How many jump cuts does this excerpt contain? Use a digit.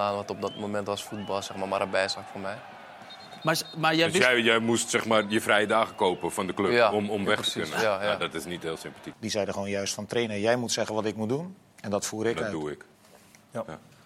1